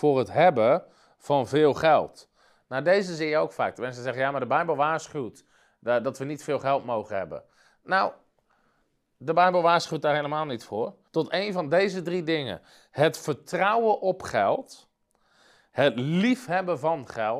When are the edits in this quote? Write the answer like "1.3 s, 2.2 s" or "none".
11.1 s